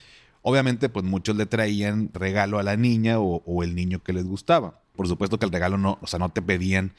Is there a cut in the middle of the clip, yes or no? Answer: yes